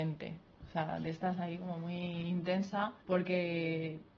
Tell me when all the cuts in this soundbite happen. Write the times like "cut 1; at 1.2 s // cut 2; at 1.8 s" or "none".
cut 1; at 3.0 s

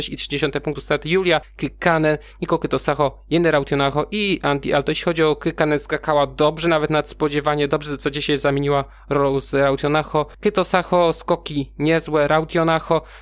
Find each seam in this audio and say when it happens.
none

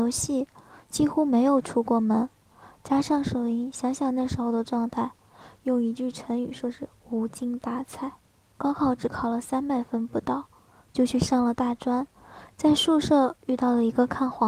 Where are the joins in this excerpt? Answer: cut 1; at 8.5 s

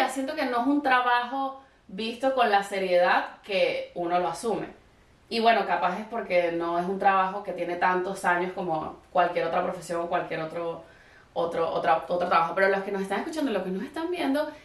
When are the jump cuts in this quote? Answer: none

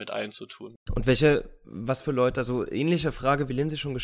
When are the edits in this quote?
none

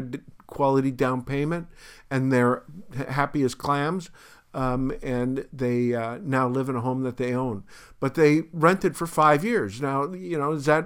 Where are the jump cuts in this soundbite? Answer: none

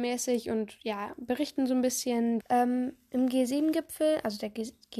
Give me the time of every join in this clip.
cut 1; at 2.4 s

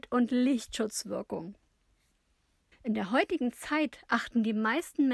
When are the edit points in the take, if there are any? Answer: cut 1; at 2.7 s

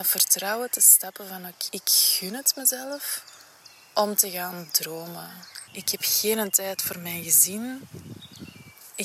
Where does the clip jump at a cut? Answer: cut 1; at 1.7 s // cut 2; at 5.7 s

